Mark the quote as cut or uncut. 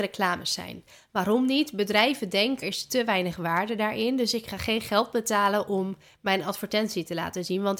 cut